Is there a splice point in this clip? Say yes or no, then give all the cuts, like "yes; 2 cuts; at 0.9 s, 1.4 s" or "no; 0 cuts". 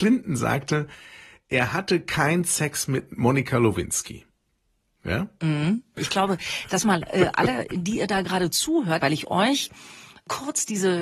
yes; 2 cuts; at 6.0 s, 9.0 s